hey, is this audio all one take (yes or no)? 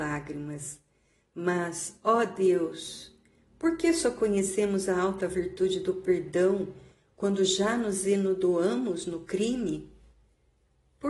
yes